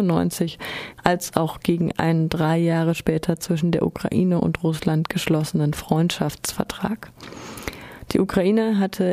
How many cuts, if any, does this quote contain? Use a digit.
1